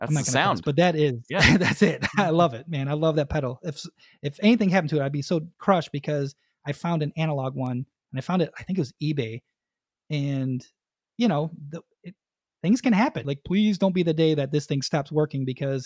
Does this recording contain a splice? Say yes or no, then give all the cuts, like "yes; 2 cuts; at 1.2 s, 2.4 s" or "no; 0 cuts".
yes; 1 cut; at 13.2 s